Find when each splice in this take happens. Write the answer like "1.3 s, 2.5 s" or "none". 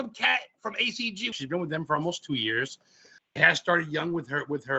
1.3 s, 3.2 s